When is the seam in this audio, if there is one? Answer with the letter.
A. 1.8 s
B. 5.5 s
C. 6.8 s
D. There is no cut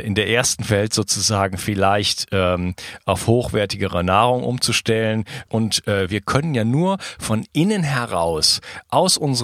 B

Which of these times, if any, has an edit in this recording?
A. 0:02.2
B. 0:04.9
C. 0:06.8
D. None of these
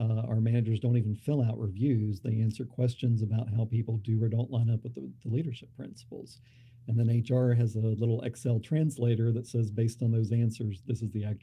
D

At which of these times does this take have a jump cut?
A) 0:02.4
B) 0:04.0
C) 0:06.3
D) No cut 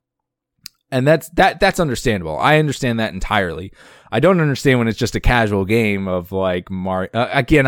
D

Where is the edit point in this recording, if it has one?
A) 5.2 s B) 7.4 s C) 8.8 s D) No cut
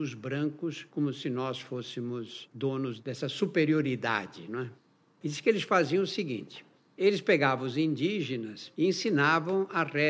A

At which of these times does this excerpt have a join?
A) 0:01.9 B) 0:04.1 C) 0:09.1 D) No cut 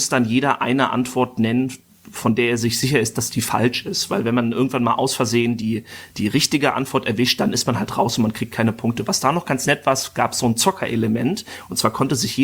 D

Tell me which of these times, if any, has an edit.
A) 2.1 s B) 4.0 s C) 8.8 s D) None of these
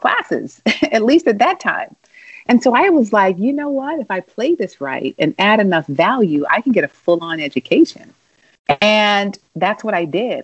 D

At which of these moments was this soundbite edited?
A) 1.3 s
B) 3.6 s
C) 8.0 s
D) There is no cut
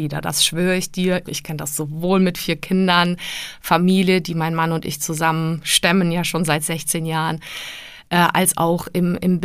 A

